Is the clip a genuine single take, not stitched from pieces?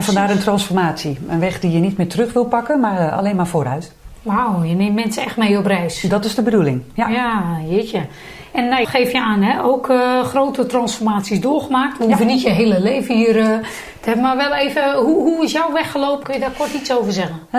no; 2 cuts; at 8.8 s, 16.2 s

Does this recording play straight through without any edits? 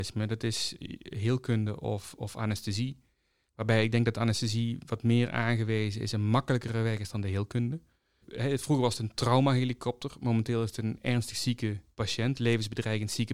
yes; 0 cuts

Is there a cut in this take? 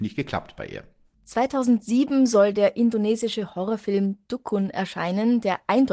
yes; 1 cut; at 1.1 s

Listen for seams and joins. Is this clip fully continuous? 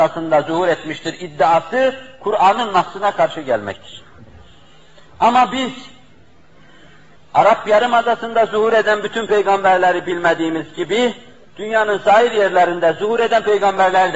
yes; 0 cuts

